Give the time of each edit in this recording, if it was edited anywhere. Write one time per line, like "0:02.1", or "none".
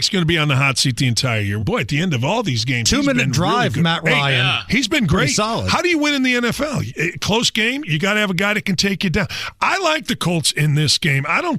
0:01.6